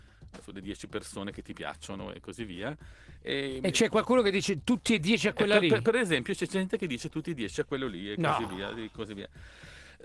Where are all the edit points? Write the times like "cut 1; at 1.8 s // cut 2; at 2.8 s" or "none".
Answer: none